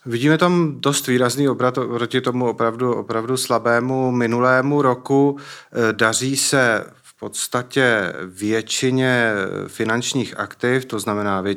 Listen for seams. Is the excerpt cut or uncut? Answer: uncut